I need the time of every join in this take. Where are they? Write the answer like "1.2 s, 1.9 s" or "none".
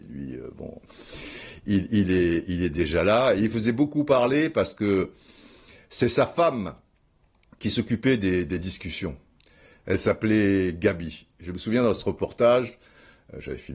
none